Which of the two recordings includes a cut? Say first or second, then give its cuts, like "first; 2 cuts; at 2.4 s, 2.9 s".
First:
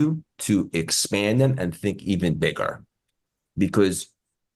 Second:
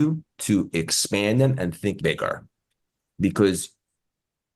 second; 1 cut; at 2.0 s